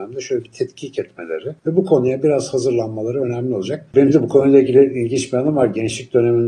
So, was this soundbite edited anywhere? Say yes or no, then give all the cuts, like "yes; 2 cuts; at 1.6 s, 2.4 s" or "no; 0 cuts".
yes; 1 cut; at 3.9 s